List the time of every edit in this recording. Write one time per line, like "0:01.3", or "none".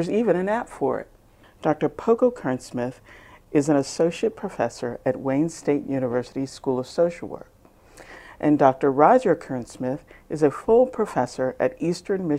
0:01.4